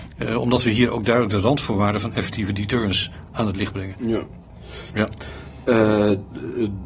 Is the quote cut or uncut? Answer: cut